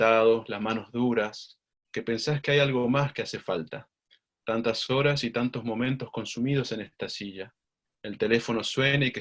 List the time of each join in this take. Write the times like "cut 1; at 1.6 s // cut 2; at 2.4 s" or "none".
cut 1; at 1.8 s